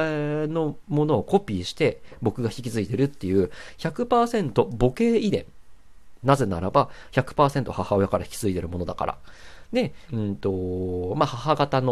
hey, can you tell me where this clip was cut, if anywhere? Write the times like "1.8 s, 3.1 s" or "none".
6.2 s, 10.1 s